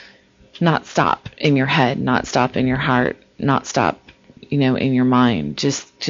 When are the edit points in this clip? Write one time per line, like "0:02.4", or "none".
none